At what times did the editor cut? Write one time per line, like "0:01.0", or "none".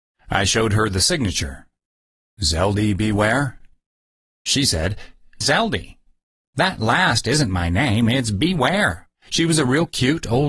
0:05.4
0:09.2